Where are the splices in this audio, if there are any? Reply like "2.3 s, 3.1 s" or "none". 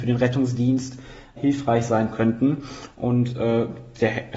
1.4 s